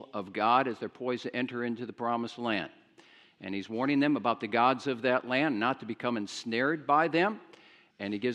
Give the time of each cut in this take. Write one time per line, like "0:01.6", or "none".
none